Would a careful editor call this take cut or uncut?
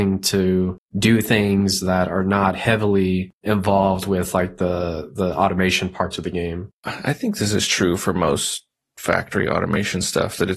uncut